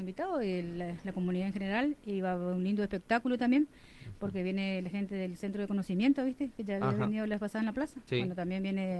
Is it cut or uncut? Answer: uncut